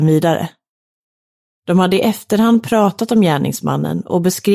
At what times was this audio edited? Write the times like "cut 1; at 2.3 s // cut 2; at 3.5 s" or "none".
cut 1; at 1.6 s